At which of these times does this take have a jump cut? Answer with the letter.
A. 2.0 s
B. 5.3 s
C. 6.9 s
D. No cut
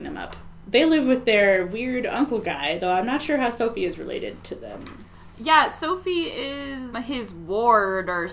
C